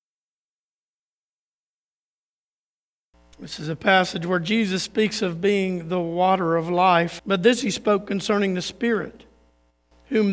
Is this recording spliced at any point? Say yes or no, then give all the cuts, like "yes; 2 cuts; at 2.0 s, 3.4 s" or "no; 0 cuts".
yes; 1 cut; at 7.2 s